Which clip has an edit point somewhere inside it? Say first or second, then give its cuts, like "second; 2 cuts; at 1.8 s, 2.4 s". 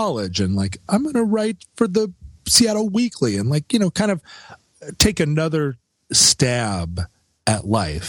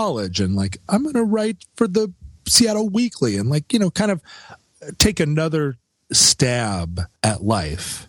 second; 1 cut; at 7.2 s